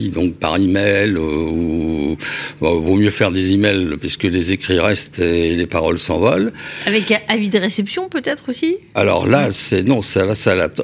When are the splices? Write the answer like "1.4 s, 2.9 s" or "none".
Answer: none